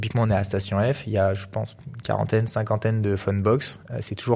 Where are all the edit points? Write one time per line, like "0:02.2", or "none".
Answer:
none